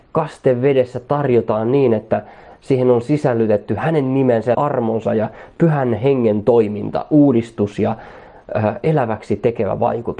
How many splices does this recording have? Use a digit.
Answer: 1